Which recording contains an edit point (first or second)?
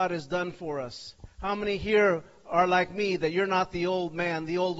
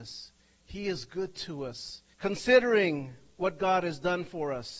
second